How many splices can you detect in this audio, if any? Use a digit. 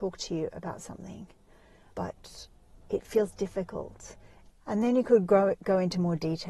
2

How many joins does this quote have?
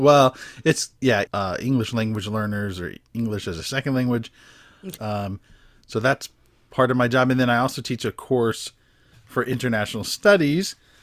2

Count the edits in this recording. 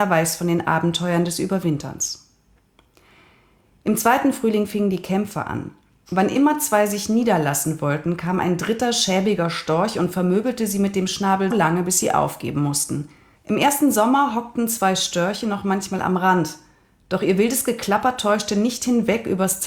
2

